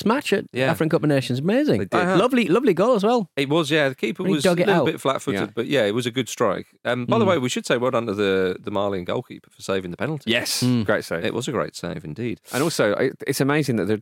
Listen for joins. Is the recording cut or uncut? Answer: uncut